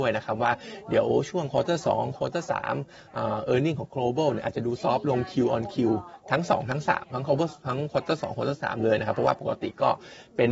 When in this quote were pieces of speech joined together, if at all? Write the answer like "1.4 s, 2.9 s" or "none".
none